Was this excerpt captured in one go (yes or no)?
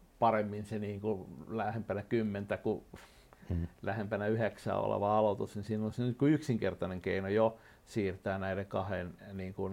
yes